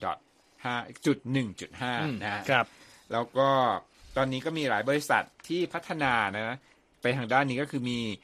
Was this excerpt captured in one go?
yes; 0 cuts

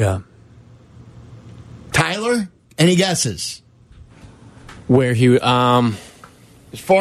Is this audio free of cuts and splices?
yes; 0 cuts

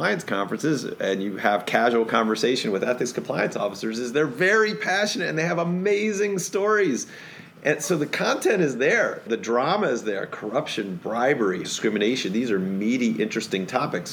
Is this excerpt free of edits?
no; 1 cut; at 11.6 s

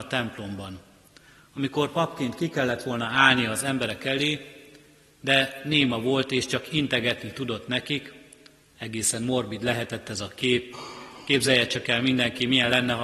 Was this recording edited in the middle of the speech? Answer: no; 0 cuts

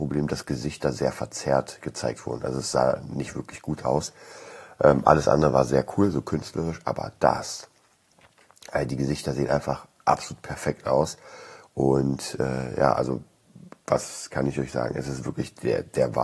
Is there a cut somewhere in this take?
no; 0 cuts

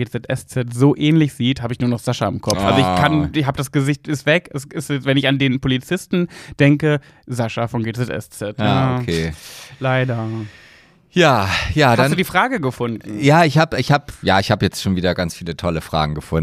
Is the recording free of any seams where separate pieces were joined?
yes; 0 cuts

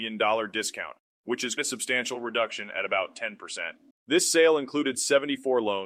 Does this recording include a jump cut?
yes; 2 cuts; at 1.6 s, 3.9 s

